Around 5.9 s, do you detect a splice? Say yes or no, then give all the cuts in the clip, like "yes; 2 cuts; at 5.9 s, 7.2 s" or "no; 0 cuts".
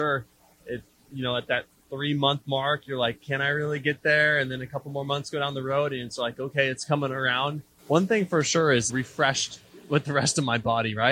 no; 2 cuts; at 7.8 s, 8.9 s